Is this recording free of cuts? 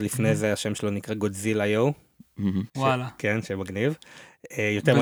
no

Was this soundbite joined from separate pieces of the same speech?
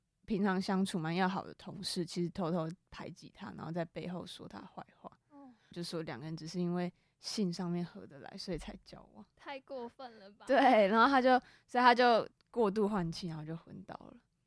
yes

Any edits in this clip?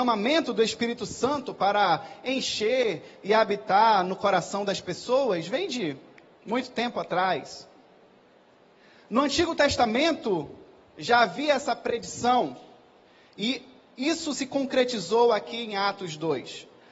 no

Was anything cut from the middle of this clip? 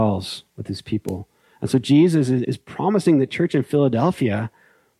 yes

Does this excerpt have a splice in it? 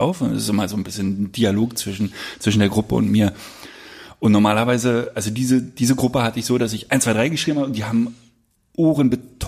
no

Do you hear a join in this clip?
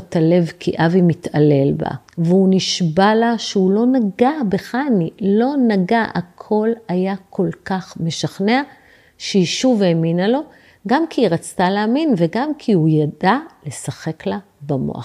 yes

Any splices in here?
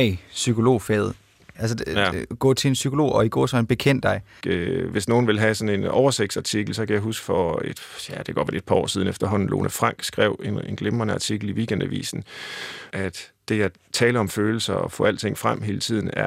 yes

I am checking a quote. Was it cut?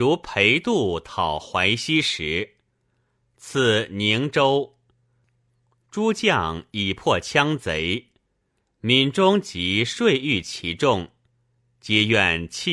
no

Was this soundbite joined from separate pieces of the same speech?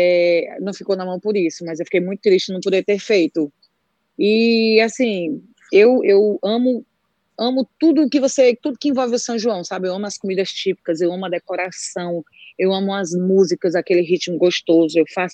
no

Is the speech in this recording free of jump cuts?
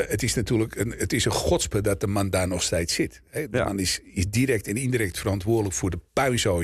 yes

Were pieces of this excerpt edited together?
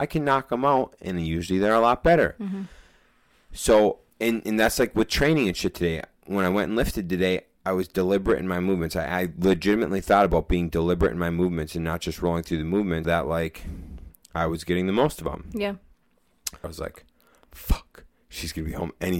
yes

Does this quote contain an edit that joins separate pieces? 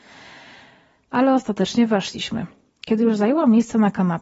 no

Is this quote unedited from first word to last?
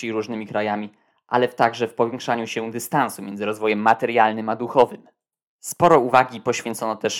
yes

